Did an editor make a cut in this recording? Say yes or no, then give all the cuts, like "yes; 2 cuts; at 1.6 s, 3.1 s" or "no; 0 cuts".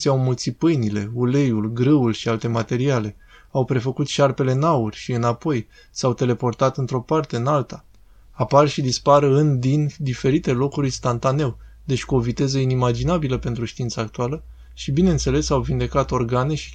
no; 0 cuts